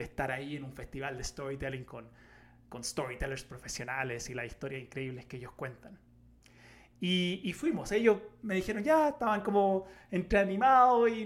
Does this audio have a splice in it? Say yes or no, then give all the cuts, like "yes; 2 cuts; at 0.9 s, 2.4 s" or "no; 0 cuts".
no; 0 cuts